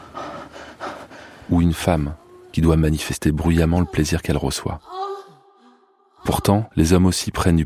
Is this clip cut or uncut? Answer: uncut